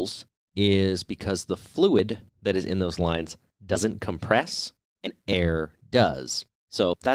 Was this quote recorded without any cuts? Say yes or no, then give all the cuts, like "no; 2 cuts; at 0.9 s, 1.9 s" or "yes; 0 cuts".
no; 1 cut; at 2.3 s